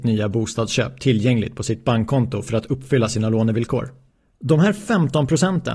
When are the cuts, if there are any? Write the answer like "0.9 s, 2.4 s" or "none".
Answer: none